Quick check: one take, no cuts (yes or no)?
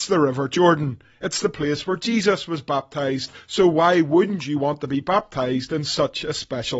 yes